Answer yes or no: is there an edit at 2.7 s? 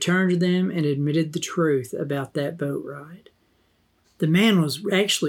no